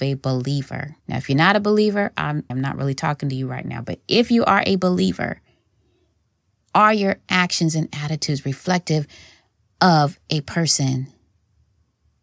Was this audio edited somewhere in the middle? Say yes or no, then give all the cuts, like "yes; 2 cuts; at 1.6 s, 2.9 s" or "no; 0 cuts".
yes; 2 cuts; at 1.0 s, 2.5 s